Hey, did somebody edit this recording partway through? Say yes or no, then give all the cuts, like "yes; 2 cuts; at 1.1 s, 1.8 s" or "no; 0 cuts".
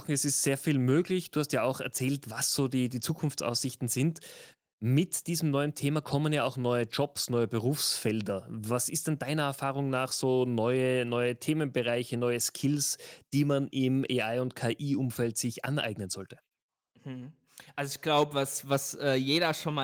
no; 0 cuts